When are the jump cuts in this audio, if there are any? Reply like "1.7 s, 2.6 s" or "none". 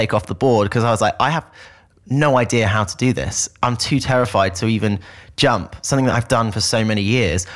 none